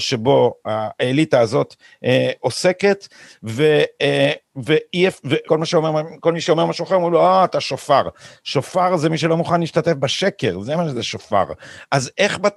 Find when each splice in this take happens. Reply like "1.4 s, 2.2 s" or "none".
5.4 s